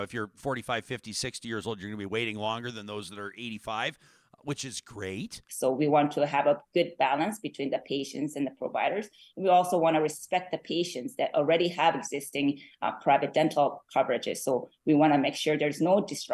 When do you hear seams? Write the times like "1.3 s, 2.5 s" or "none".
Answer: 5.5 s

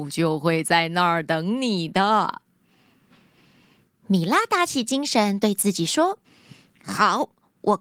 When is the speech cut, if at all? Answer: 6.2 s

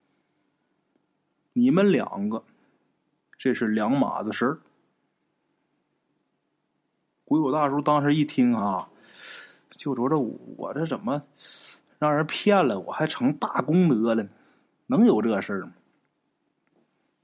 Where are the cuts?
none

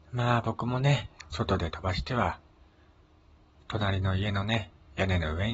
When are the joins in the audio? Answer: 1.3 s

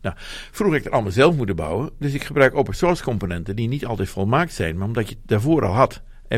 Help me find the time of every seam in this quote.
none

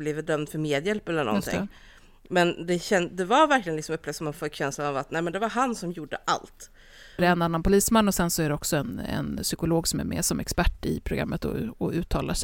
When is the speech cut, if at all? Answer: 7.2 s

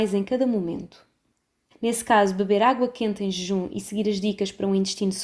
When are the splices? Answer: 1.7 s

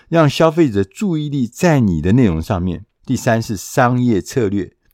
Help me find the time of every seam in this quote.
3.0 s

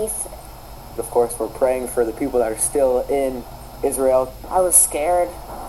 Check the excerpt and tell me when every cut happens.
1.0 s

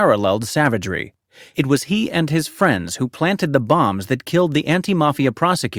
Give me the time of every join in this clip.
none

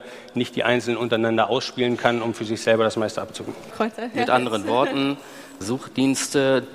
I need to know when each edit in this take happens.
3.7 s, 5.6 s

